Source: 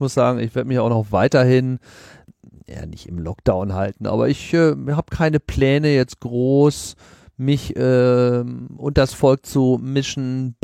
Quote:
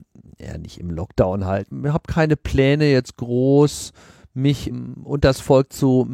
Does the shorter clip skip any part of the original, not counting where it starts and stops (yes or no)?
yes